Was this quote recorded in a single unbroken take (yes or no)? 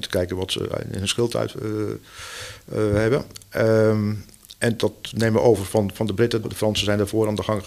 no